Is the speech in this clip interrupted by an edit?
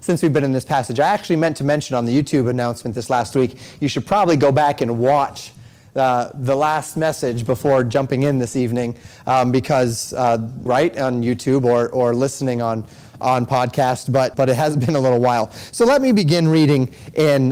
yes; 2 cuts; at 10.7 s, 14.3 s

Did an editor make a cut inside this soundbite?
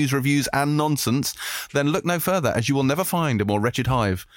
no; 0 cuts

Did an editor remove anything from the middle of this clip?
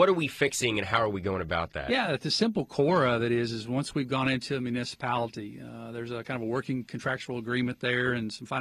no; 0 cuts

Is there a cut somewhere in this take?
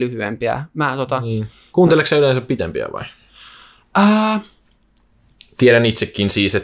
no; 0 cuts

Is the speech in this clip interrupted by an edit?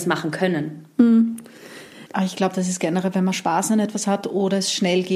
yes; 1 cut; at 2.1 s

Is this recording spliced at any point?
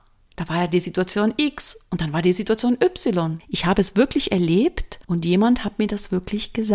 yes; 2 cuts; at 3.4 s, 5.0 s

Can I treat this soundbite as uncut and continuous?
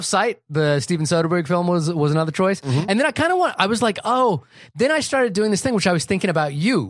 yes; 0 cuts

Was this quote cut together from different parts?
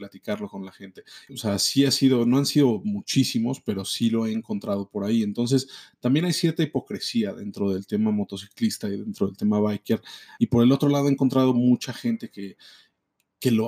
yes; 2 cuts; at 1.3 s, 10.4 s

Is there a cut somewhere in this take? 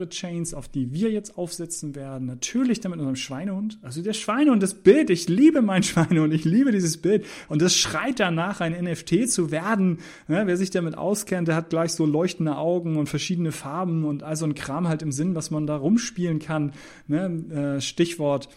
no; 0 cuts

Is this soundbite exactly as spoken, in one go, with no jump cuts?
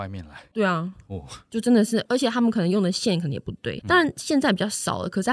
yes; 0 cuts

